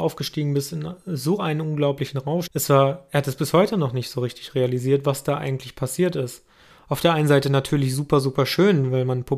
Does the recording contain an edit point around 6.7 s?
yes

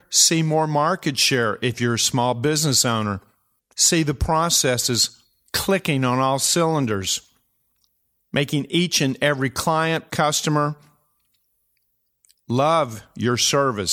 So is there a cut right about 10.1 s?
yes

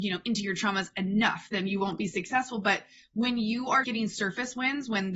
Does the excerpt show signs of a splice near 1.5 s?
no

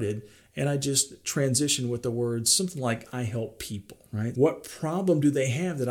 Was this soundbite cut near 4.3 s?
yes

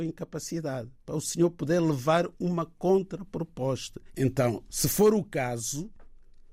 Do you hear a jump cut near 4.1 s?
yes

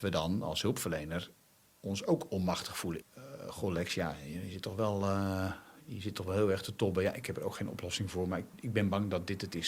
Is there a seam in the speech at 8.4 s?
no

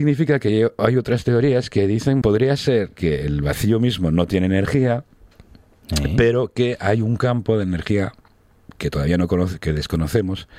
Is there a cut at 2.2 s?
yes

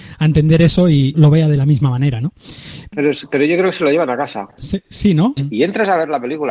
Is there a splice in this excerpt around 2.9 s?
no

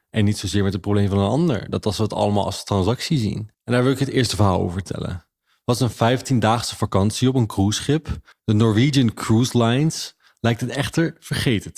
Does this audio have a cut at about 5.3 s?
no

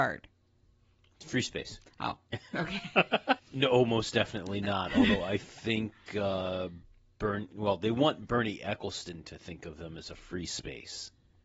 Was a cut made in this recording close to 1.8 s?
no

